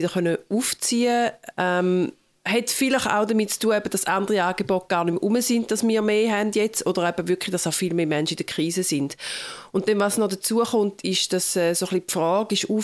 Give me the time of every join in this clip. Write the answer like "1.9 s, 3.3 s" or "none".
1.5 s